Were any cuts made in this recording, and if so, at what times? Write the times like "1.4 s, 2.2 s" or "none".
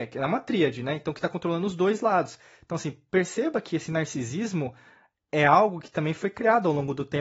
none